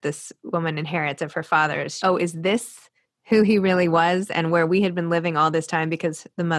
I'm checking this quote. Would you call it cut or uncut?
cut